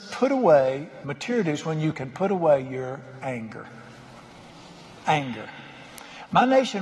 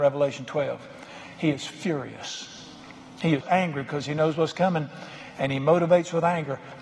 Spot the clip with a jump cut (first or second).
second